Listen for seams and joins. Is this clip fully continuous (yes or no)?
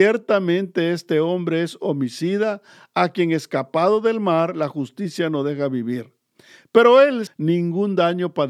no